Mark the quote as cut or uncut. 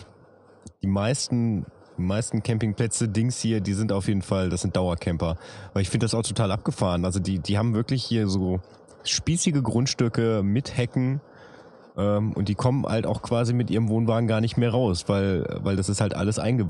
uncut